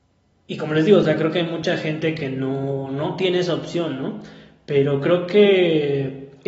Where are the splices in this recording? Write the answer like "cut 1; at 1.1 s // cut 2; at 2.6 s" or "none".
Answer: none